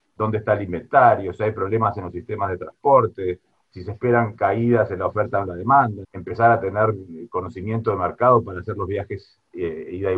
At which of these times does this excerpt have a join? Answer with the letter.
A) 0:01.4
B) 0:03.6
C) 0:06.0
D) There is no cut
C